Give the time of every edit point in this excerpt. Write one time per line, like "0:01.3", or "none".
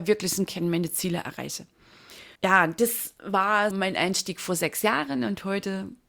0:02.3
0:03.7